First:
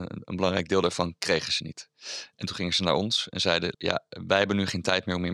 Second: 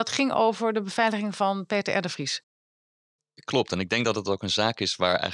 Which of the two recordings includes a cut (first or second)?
first